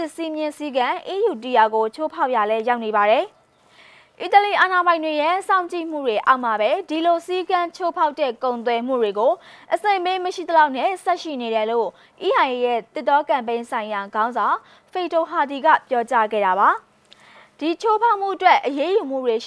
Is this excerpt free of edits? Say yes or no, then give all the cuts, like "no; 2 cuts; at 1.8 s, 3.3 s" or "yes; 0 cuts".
yes; 0 cuts